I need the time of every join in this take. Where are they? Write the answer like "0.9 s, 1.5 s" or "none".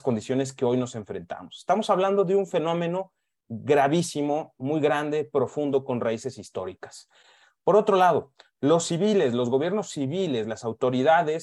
none